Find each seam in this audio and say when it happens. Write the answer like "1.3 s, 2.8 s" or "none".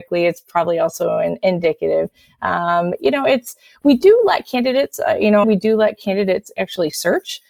5.4 s